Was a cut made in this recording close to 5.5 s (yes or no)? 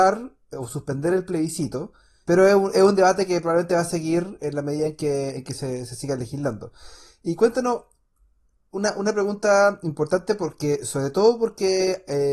no